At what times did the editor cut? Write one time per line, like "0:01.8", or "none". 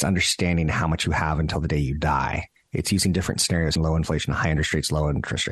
0:03.8